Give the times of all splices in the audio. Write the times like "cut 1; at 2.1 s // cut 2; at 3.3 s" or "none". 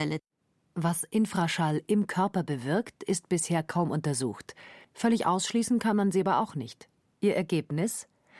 cut 1; at 4.8 s // cut 2; at 7.2 s